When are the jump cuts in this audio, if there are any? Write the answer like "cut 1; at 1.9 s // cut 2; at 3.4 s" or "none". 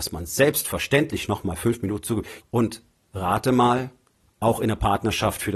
cut 1; at 2.4 s